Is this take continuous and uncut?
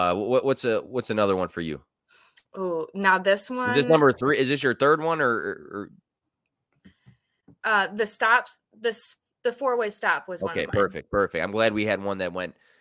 yes; 0 cuts

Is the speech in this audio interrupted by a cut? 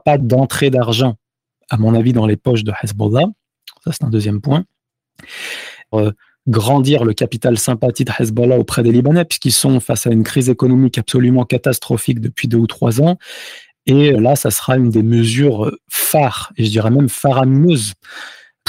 yes; 2 cuts; at 5.9 s, 14.1 s

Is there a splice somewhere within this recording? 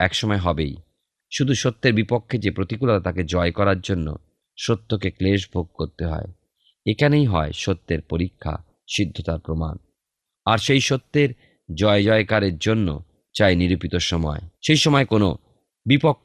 yes; 1 cut; at 14.6 s

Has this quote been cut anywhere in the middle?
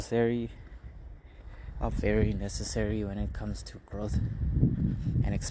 no; 0 cuts

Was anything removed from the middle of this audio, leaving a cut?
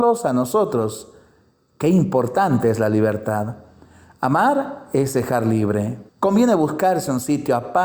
yes; 1 cut; at 6.1 s

